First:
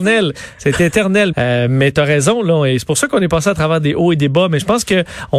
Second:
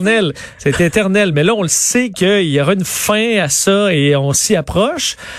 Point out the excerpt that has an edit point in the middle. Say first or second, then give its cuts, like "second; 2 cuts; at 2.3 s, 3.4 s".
first; 1 cut; at 1.3 s